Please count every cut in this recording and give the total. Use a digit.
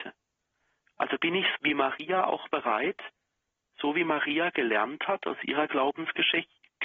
1